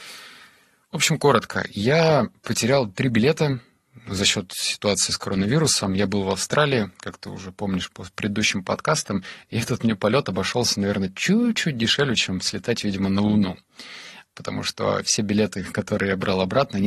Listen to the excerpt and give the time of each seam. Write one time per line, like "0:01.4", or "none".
none